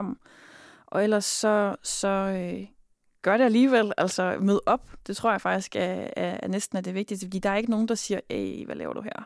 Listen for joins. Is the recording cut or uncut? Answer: uncut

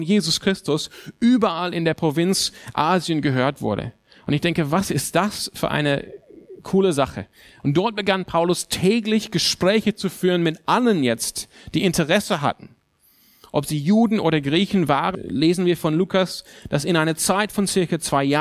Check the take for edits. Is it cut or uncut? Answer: cut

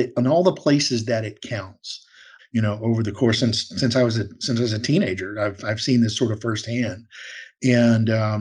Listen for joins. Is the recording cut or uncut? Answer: cut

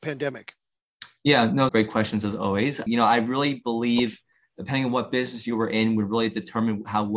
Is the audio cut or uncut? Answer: cut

